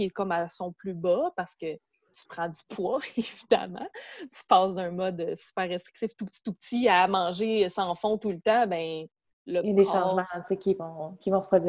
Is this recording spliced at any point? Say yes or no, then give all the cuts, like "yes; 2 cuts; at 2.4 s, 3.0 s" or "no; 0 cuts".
no; 0 cuts